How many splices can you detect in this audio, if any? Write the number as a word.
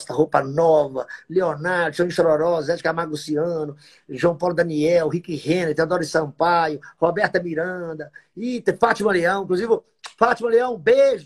zero